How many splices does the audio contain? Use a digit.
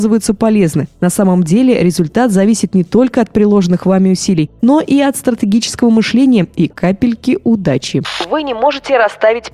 1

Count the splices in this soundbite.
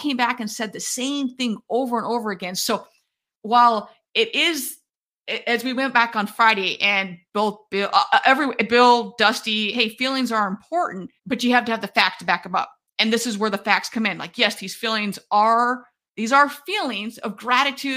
2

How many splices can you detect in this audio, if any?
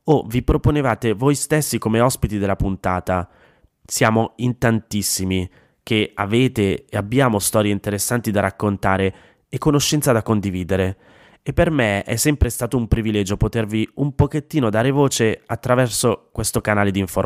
1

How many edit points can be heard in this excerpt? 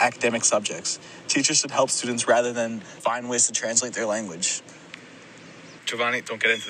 2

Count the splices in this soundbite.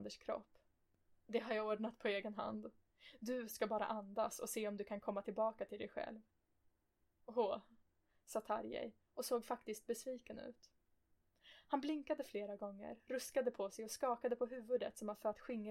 0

